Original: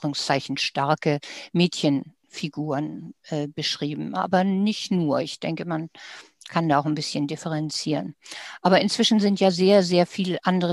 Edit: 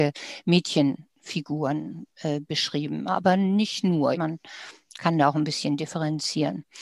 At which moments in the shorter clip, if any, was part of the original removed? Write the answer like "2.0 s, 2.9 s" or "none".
4.1 s

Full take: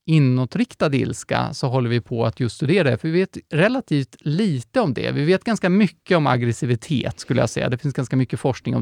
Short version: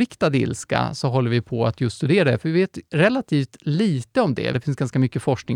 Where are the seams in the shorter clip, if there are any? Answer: 4.5 s

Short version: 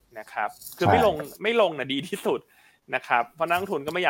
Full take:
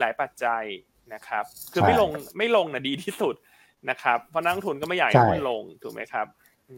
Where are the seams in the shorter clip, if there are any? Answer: none

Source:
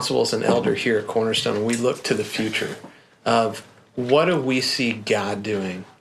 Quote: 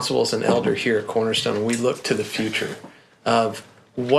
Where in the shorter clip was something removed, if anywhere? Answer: none

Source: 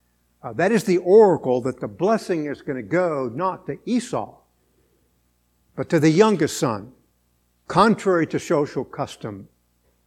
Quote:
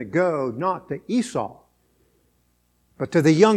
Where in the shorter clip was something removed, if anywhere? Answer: none

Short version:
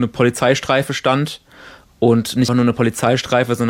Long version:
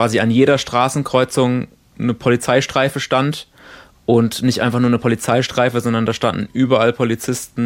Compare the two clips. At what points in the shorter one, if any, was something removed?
2.5 s

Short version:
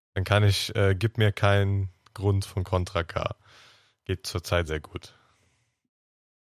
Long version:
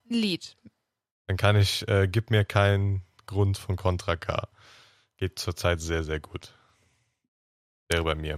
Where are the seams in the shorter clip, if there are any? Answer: 4.7 s

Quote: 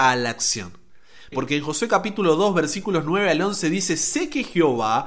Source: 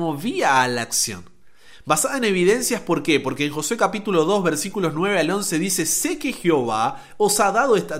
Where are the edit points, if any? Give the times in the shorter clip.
1.3 s

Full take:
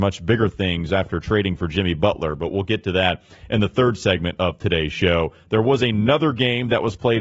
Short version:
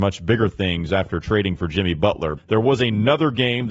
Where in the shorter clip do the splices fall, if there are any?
2.4 s

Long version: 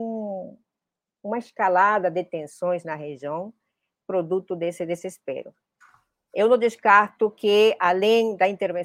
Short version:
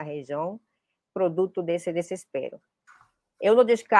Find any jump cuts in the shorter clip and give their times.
none

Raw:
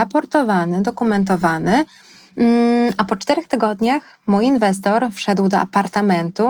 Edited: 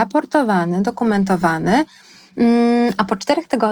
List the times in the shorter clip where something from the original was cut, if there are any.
none

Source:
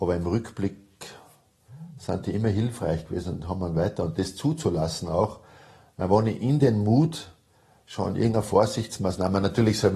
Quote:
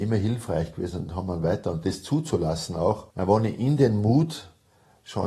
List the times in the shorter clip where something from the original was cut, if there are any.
3.1 s

